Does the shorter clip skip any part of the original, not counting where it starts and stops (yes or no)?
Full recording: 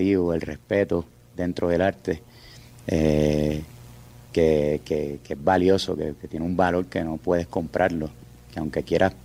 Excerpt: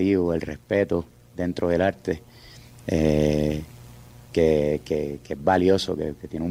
no